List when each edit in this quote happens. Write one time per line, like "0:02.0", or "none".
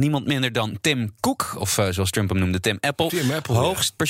none